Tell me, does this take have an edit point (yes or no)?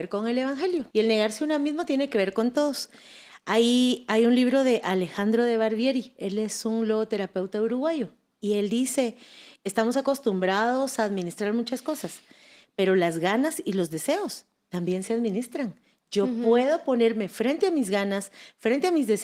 yes